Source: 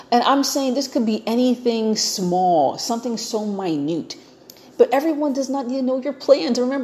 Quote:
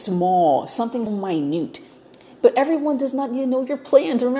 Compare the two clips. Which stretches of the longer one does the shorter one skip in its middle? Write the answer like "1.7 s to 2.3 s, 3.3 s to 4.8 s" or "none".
3.2 s to 3.4 s